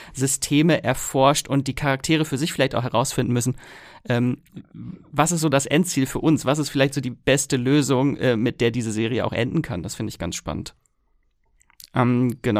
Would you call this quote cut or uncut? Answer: uncut